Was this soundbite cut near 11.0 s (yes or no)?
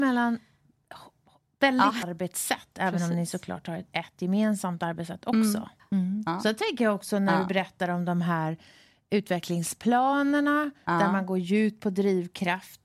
no